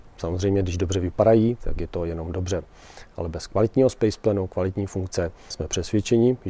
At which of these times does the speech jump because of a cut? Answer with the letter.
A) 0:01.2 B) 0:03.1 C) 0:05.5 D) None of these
C